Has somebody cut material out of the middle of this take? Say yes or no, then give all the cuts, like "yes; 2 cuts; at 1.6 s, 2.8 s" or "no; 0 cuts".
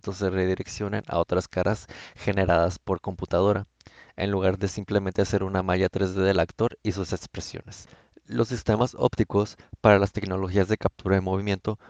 no; 0 cuts